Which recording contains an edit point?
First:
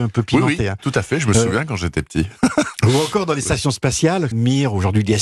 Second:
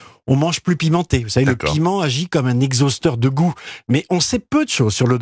first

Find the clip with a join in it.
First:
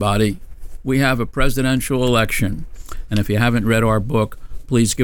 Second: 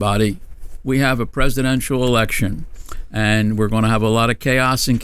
first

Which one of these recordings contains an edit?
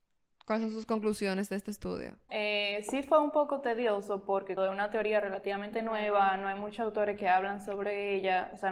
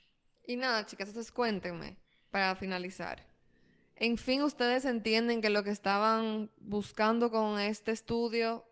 first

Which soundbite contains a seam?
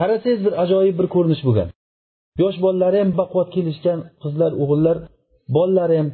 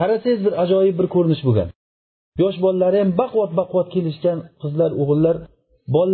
first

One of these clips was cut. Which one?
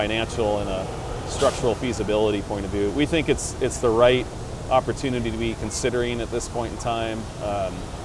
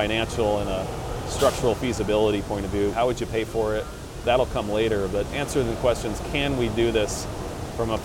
second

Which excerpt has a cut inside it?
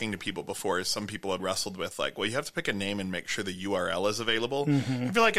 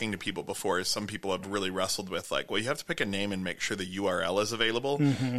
first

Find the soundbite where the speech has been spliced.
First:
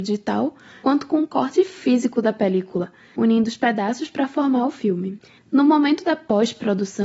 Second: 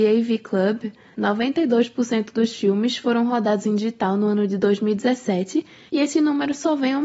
first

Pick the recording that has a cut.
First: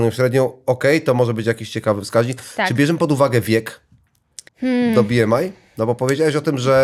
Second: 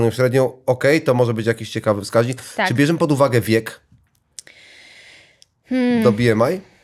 first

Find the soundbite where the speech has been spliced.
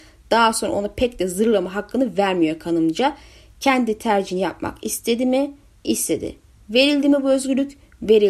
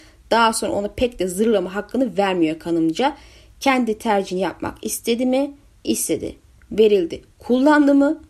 second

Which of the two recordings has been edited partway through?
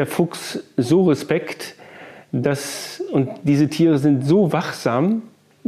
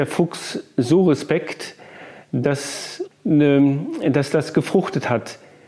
second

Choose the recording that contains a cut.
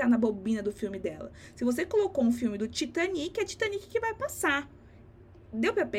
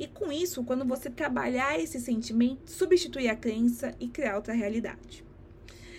second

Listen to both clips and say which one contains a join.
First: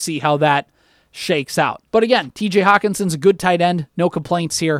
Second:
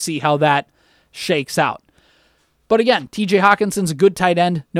first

